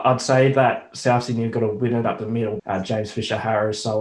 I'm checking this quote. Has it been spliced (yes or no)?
yes